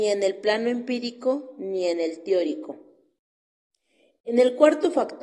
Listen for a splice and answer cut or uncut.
uncut